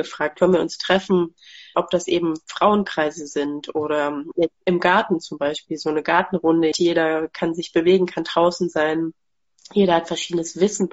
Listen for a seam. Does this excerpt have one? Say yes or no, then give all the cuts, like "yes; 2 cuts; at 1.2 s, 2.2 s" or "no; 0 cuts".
yes; 2 cuts; at 1.7 s, 6.7 s